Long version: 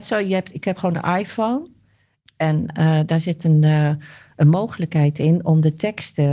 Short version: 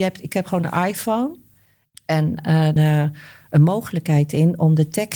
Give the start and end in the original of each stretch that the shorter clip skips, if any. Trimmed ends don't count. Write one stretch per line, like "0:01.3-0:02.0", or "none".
0:03.1-0:03.6